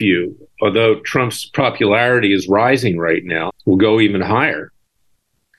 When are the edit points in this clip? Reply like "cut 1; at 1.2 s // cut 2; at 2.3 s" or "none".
cut 1; at 3.5 s